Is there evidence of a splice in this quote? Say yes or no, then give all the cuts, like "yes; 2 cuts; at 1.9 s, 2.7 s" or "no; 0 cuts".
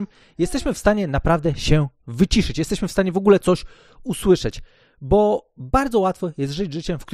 no; 0 cuts